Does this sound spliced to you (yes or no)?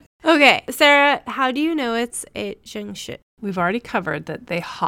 no